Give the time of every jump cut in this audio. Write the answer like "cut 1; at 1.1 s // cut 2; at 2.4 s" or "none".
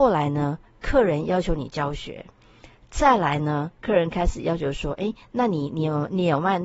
cut 1; at 3.7 s